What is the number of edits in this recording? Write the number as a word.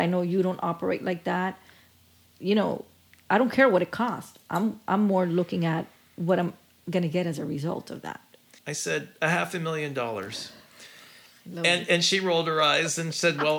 one